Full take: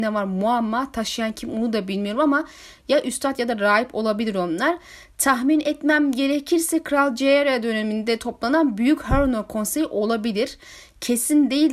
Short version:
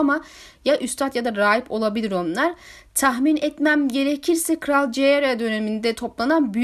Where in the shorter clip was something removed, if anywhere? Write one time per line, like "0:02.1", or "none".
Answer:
none